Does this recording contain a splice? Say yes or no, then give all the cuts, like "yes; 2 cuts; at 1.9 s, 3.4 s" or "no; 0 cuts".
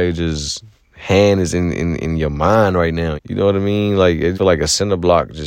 yes; 2 cuts; at 3.2 s, 4.3 s